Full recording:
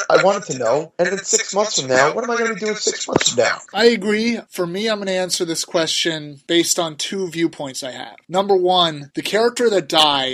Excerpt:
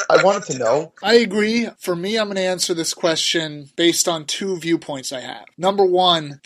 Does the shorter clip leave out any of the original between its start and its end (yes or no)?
yes